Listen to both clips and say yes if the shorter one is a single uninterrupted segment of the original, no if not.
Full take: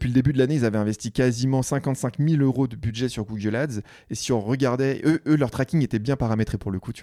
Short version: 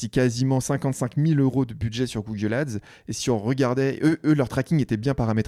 yes